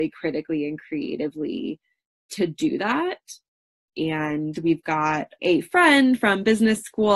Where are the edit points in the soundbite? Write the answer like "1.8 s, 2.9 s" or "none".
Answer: 3.9 s, 5.4 s